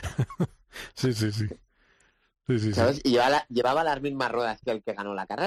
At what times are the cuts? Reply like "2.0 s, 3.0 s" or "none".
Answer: none